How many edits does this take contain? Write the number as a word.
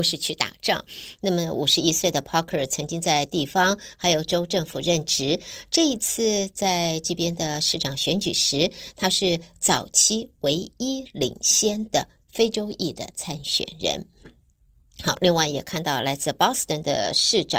one